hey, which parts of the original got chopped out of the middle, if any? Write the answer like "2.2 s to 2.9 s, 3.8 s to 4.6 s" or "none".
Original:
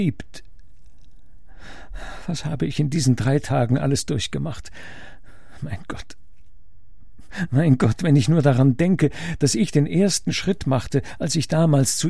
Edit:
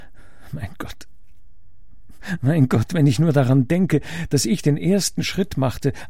none